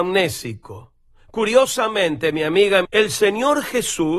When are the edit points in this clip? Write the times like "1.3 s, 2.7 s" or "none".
2.8 s